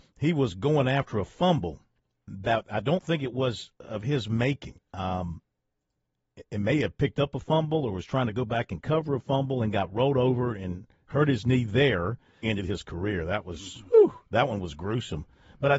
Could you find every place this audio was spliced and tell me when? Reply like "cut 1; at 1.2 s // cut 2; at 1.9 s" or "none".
cut 1; at 12.4 s // cut 2; at 14.3 s